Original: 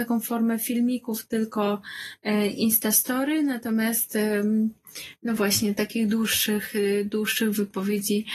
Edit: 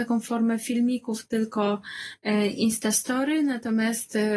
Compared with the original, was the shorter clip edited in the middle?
no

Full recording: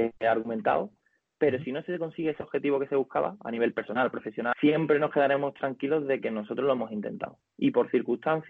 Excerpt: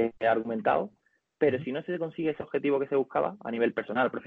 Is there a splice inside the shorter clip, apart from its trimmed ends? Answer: no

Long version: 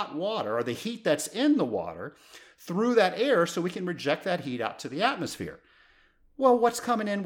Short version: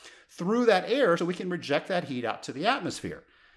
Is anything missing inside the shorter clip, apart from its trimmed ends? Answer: yes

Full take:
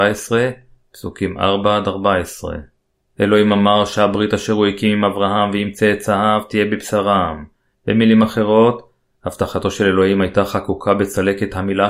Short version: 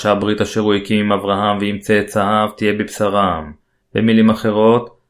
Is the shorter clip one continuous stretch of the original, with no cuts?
yes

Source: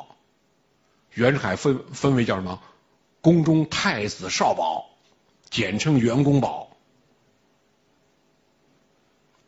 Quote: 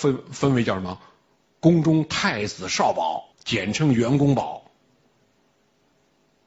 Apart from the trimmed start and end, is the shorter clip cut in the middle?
yes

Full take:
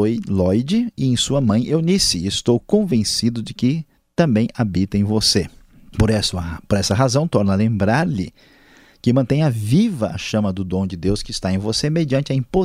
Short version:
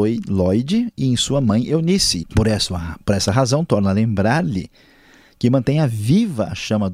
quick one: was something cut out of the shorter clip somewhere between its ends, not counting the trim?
yes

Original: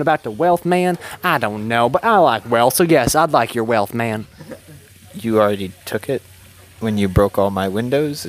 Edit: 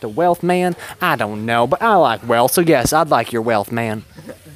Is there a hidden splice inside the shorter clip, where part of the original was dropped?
no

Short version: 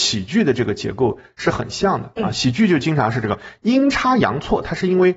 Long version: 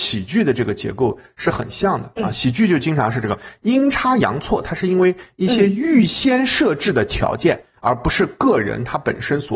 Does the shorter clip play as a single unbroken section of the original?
yes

